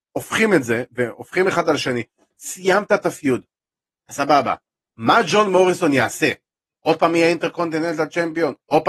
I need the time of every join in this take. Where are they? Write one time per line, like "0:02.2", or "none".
none

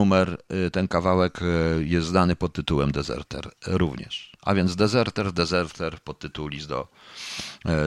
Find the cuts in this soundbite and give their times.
none

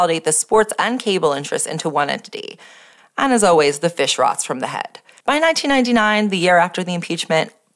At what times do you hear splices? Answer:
0:03.0
0:05.2

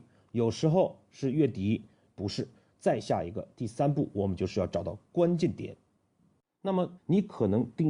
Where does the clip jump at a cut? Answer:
0:02.1
0:07.0

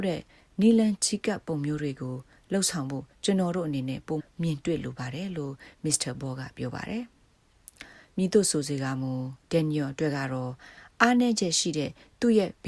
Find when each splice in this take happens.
0:04.2
0:09.4

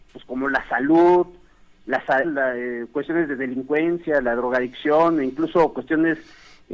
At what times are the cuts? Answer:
0:02.2

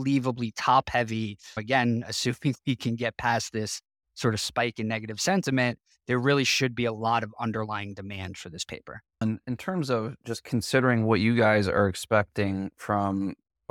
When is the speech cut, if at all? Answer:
0:09.2

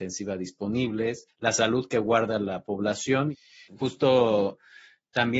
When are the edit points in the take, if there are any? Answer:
0:03.7

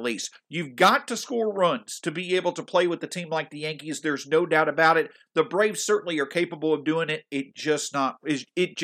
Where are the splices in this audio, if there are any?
none

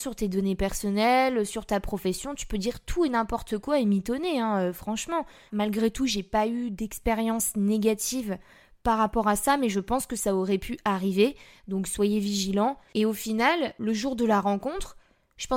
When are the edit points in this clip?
0:05.5
0:12.9

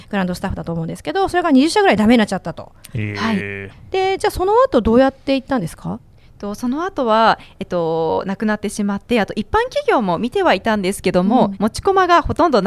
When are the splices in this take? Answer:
0:03.7
0:11.5

